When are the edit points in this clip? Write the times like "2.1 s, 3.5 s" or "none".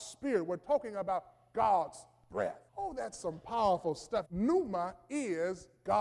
2.7 s, 4.2 s